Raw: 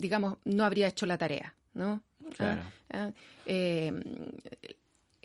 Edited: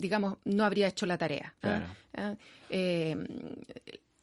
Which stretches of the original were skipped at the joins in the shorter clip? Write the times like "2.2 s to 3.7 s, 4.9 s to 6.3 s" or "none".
1.6 s to 2.4 s